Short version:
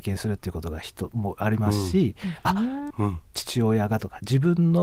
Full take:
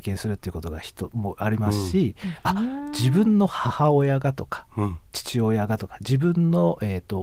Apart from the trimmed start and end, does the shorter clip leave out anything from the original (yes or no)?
yes